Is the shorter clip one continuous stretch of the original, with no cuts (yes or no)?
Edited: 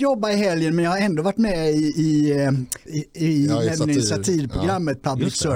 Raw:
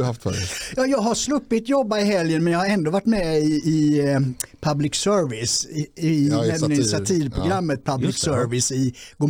no